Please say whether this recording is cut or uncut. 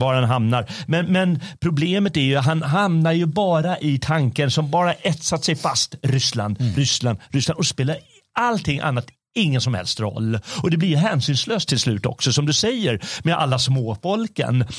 uncut